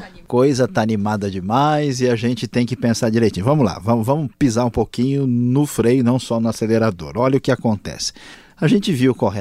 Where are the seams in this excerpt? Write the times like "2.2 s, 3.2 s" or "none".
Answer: none